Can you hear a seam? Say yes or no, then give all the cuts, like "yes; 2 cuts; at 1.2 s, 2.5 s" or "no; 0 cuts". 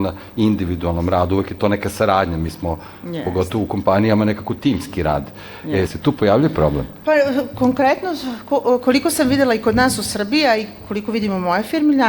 yes; 1 cut; at 5.9 s